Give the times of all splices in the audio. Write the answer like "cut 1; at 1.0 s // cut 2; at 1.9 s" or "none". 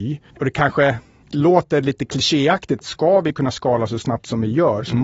cut 1; at 2.8 s